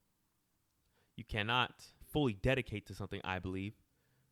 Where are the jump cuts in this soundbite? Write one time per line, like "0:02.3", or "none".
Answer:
0:02.0